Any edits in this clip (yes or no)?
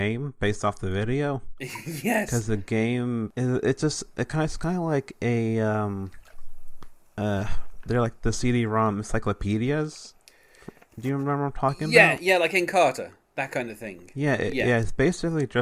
yes